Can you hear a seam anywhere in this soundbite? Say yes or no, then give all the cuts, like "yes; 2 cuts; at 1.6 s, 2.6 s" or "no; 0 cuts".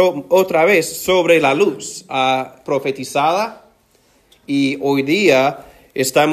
yes; 1 cut; at 2.6 s